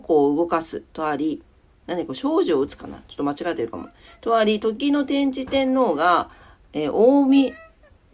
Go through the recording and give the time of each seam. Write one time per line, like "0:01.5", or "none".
none